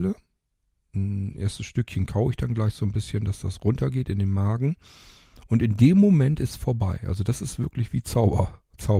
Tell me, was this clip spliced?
no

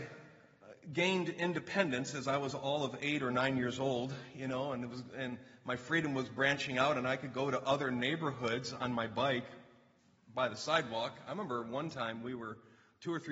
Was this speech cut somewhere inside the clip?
no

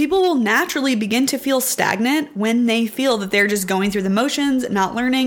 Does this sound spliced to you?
no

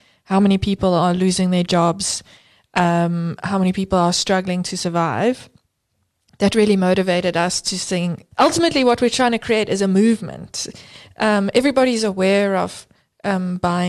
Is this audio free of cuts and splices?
no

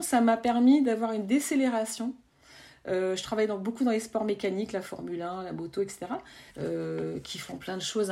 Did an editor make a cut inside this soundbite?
yes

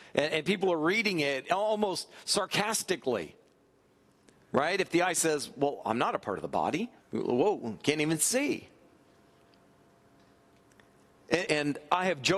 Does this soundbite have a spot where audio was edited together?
yes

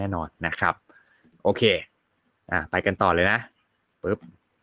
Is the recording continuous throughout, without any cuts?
yes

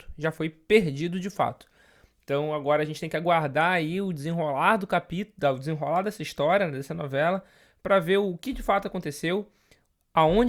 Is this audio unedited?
yes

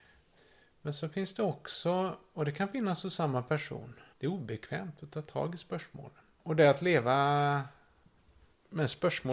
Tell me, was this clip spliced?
yes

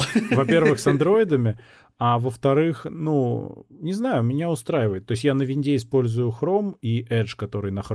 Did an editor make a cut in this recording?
no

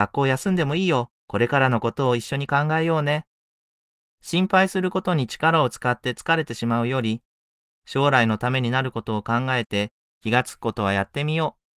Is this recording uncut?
no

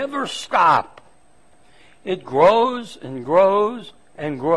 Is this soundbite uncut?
yes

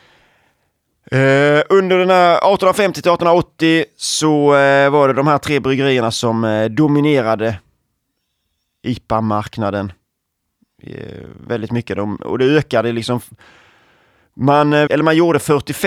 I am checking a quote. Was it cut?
yes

